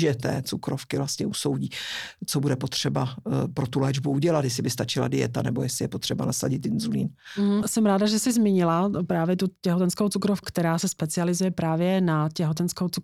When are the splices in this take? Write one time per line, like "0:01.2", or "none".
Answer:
0:07.6
0:10.4